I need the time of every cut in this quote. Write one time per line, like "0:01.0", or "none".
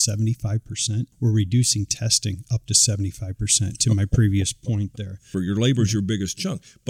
0:01.1
0:05.3